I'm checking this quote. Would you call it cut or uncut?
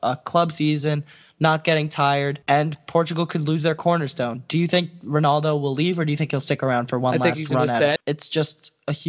cut